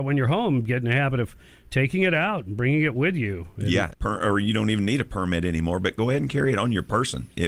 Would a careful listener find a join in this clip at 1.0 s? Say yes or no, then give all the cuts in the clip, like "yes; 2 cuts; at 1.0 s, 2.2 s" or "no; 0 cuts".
no; 1 cut; at 3.9 s